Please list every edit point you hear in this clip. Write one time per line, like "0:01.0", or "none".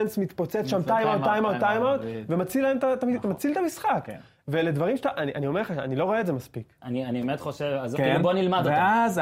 0:06.8
0:07.9